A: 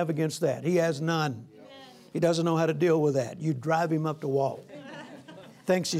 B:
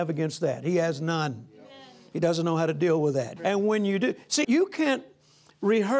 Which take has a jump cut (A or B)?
B